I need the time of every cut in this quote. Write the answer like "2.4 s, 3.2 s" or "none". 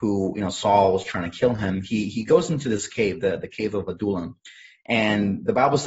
none